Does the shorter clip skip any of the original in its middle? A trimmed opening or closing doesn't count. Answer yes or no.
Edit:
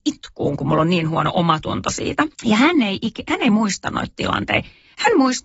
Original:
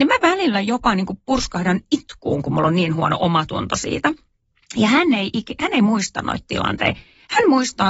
yes